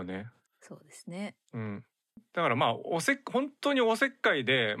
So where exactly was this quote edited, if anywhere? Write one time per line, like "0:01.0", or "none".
0:01.4